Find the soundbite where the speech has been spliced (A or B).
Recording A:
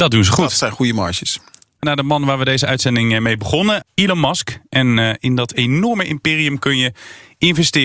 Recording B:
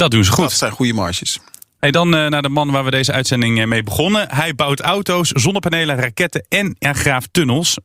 A